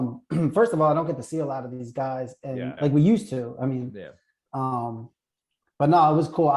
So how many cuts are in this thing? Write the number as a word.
two